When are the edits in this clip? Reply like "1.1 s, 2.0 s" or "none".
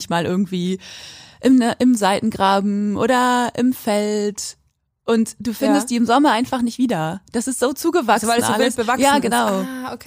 none